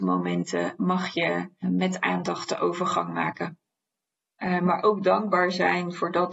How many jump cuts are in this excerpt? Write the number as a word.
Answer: two